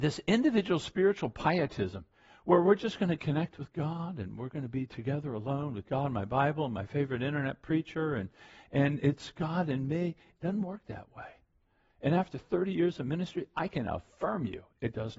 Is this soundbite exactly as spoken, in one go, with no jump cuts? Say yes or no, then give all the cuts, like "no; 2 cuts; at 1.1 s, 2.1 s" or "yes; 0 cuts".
yes; 0 cuts